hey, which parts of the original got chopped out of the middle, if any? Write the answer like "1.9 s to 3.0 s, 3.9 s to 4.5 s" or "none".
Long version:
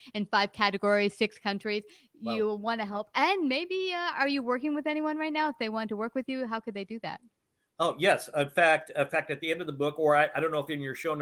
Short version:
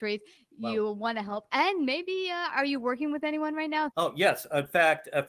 5.5 s to 7.7 s